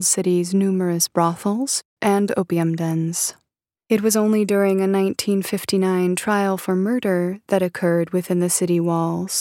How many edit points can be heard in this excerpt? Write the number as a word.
two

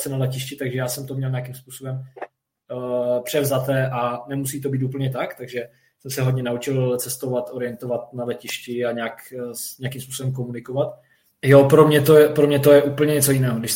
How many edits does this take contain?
one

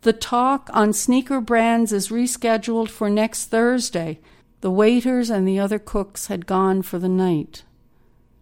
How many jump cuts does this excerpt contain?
one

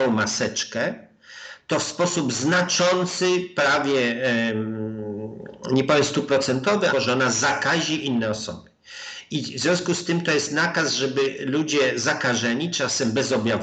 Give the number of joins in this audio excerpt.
one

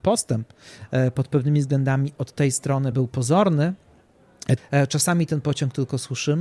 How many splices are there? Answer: two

